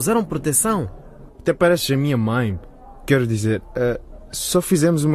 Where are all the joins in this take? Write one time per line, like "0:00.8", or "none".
0:01.3
0:03.0